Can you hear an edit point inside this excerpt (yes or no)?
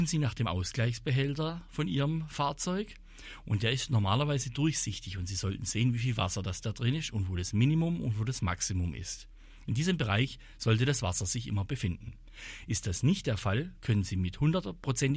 no